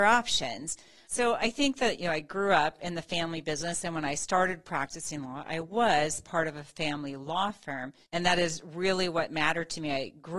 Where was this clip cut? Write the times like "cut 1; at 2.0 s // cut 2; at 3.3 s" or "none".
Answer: cut 1; at 1.0 s // cut 2; at 8.0 s